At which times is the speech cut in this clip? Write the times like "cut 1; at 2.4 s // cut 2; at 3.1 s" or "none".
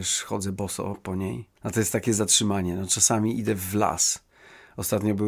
cut 1; at 1.6 s